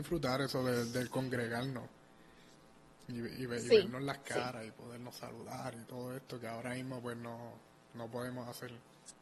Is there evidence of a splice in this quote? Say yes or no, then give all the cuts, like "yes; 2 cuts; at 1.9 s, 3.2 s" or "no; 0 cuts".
no; 0 cuts